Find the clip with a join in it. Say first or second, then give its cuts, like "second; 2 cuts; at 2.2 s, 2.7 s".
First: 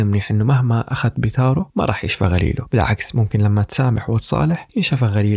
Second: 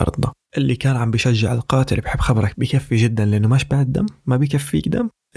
second; 1 cut; at 2.5 s